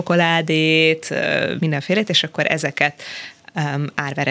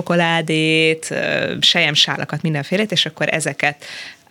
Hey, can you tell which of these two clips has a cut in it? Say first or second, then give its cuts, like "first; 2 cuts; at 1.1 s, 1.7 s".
first; 1 cut; at 1.6 s